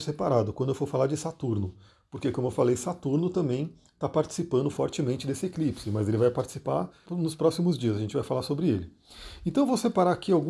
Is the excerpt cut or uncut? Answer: cut